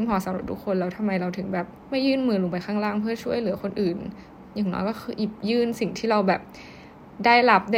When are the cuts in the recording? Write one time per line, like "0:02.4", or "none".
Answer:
0:01.8